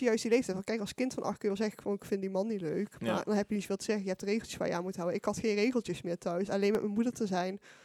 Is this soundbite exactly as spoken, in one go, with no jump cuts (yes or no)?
no